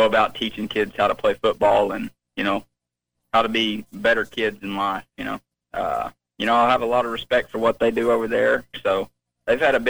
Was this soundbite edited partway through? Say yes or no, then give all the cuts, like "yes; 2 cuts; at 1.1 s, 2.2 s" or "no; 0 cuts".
yes; 2 cuts; at 5.6 s, 8.7 s